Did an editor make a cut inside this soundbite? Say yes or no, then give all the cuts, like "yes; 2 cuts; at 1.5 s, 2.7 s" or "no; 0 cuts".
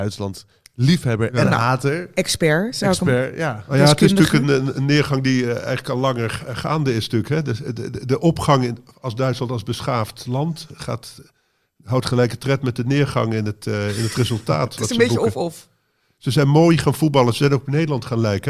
no; 0 cuts